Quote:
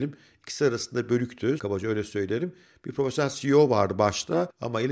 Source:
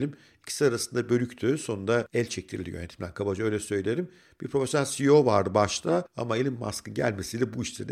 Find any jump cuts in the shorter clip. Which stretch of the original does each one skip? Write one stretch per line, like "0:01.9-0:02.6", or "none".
0:01.6-0:03.1

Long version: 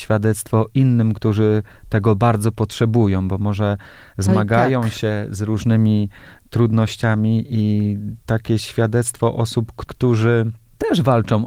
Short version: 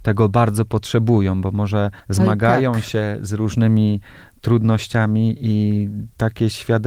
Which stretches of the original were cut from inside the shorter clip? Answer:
0:03.9-0:04.1

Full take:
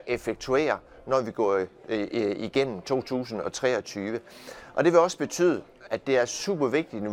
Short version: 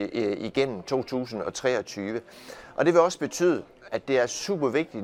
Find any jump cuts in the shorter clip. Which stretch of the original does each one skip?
none

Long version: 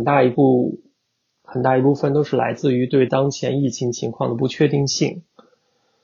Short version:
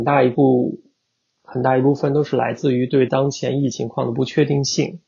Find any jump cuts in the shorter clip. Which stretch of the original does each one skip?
0:03.7-0:03.9

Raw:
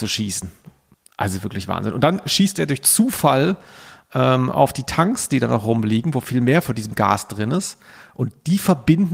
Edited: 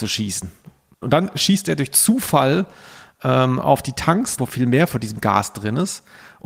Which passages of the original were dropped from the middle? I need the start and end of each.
0:01.0-0:01.9
0:05.3-0:06.1

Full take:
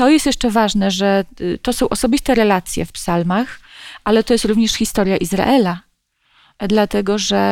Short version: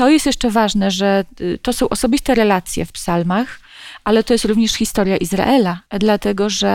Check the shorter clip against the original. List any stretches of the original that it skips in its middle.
0:05.9-0:06.5

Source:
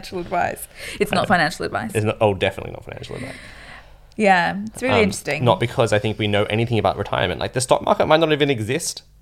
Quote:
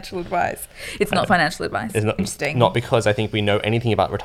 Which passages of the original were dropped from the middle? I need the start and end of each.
0:02.2-0:05.0

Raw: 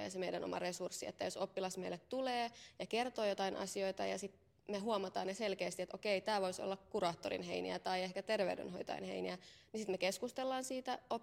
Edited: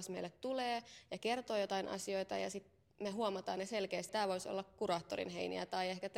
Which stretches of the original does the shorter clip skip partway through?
0:05.8-0:06.2

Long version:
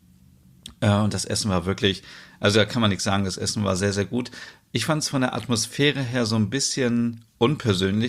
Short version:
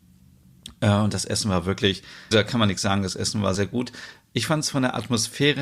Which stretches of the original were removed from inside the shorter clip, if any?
0:02.3-0:02.5
0:03.8-0:03.9

